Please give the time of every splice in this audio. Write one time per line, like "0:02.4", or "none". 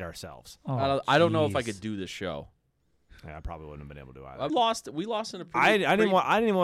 0:04.5